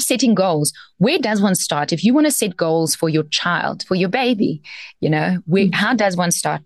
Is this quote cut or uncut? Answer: uncut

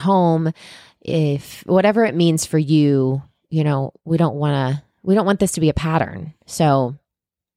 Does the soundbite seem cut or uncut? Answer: uncut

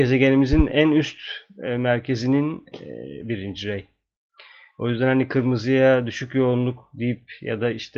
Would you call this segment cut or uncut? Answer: cut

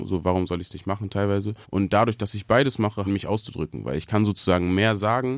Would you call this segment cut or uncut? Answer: cut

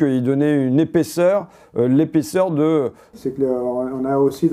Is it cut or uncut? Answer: cut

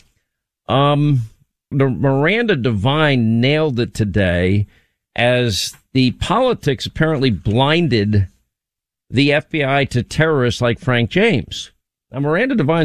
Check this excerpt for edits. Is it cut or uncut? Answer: cut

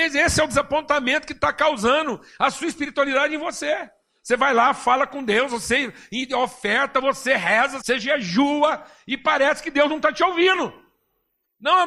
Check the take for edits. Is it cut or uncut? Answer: cut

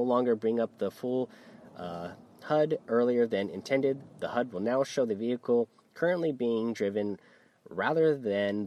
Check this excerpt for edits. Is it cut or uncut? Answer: uncut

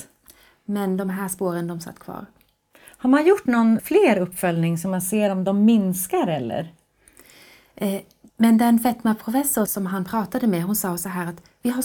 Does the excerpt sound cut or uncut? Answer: cut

